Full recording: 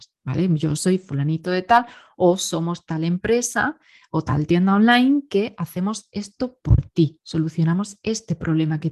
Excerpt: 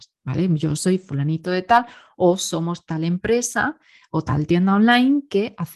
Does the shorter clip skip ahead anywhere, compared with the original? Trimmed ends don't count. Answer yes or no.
no